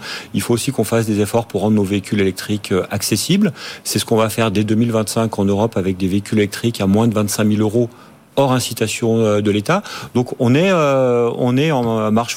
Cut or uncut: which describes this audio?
uncut